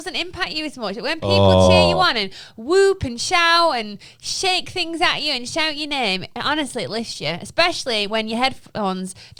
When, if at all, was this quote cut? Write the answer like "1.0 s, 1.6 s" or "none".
none